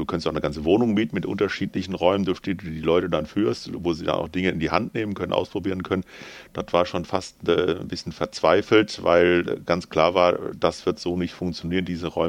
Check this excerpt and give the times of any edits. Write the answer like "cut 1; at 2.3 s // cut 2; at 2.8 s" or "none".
none

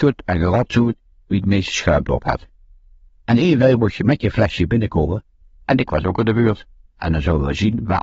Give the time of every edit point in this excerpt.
cut 1; at 6.9 s

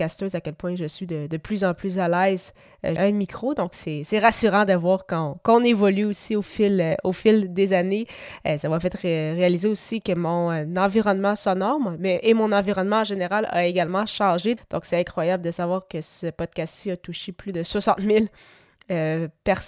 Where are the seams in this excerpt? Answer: cut 1; at 3.0 s // cut 2; at 14.6 s

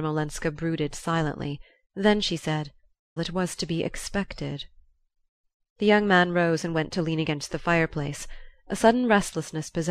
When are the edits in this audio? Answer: cut 1; at 3.2 s

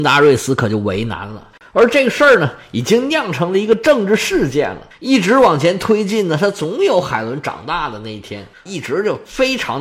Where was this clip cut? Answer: cut 1; at 1.6 s // cut 2; at 4.9 s // cut 3; at 8.7 s

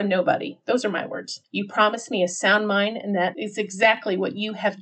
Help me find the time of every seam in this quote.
cut 1; at 1.4 s

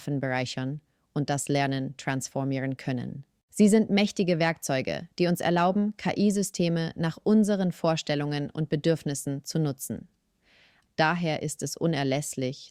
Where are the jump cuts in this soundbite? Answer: cut 1; at 10.9 s

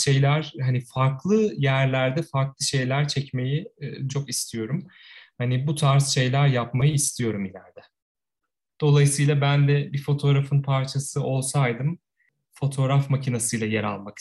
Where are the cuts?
cut 1; at 4.1 s // cut 2; at 8.7 s

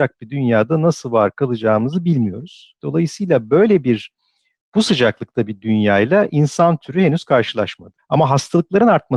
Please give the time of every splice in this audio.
cut 1; at 2.8 s // cut 2; at 8.0 s

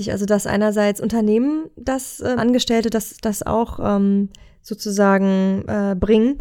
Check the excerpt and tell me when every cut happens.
cut 1; at 2.4 s

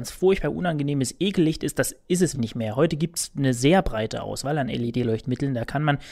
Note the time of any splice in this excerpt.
cut 1; at 2.3 s

